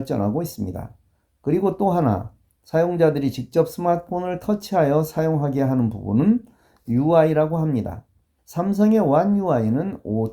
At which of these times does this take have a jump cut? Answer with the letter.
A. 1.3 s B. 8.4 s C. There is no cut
B